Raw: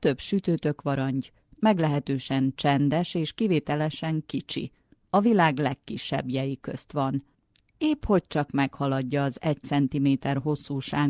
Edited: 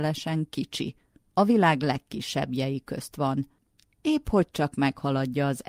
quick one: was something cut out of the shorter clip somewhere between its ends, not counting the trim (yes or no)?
no